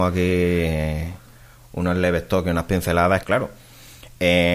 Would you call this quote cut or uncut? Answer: cut